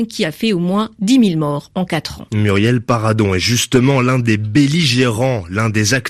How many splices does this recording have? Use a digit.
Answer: 0